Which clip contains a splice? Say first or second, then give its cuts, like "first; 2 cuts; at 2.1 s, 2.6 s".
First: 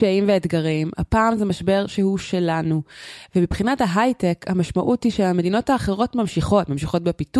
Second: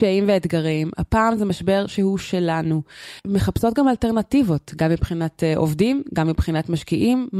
second; 1 cut; at 3.2 s